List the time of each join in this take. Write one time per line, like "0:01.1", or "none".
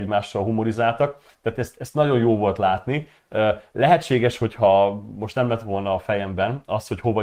none